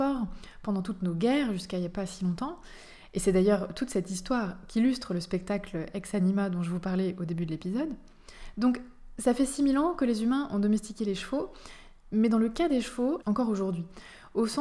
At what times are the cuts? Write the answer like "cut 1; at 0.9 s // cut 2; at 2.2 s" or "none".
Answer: cut 1; at 13.2 s